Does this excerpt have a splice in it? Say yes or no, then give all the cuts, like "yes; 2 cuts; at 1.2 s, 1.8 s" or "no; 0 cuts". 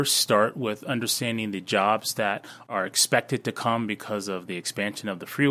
no; 0 cuts